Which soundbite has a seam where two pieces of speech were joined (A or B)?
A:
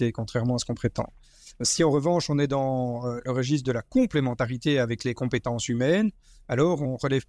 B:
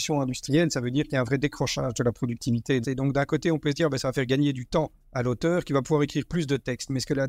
B